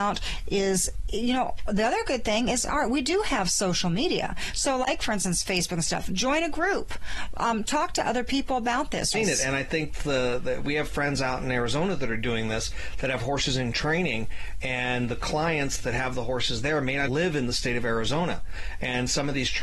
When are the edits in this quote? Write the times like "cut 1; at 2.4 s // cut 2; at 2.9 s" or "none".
cut 1; at 9.1 s // cut 2; at 17.1 s

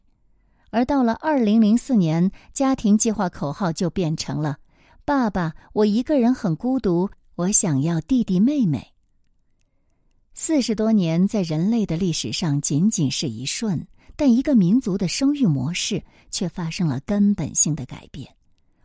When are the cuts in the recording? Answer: none

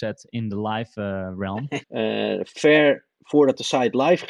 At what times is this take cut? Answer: cut 1; at 1.8 s

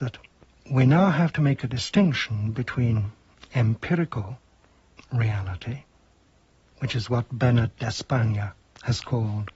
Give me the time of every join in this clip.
none

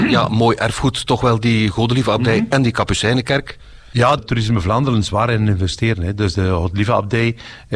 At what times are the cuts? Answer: cut 1; at 4.2 s

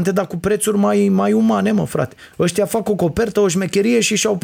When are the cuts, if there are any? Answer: none

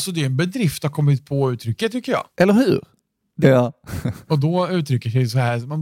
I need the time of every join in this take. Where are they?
cut 1; at 3.4 s

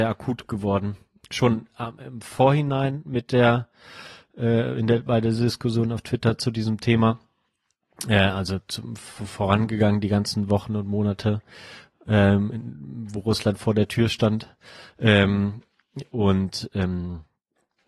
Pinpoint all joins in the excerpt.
none

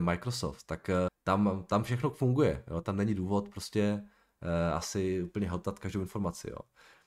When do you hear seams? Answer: cut 1; at 1.1 s

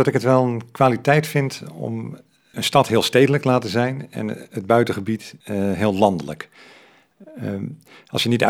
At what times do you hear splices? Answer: cut 1; at 5.4 s

